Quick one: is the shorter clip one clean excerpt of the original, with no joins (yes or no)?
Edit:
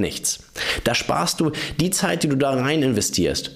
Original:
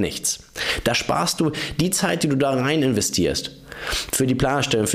yes